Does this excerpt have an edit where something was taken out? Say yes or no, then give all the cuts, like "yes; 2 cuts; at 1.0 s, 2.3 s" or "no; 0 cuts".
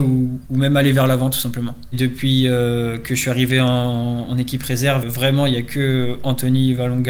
yes; 1 cut; at 5.0 s